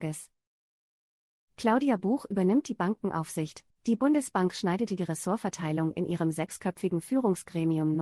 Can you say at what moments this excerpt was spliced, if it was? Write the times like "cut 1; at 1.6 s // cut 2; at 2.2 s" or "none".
cut 1; at 3.7 s